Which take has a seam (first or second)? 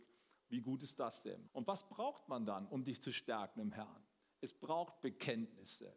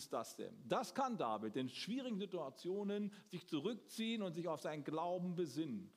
first